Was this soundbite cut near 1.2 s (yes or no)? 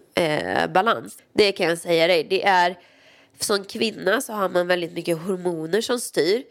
yes